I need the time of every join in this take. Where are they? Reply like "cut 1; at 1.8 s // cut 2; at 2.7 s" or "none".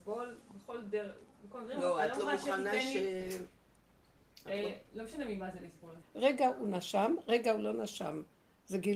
cut 1; at 6.0 s